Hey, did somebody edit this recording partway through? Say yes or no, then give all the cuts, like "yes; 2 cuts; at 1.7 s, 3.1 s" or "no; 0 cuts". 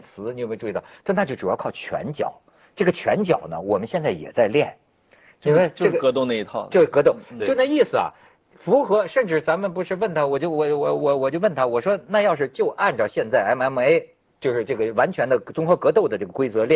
no; 0 cuts